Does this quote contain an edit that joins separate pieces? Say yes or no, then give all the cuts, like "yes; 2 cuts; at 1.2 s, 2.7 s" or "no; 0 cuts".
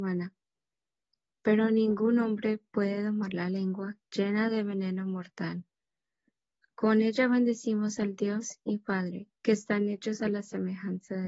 yes; 2 cuts; at 4.0 s, 9.3 s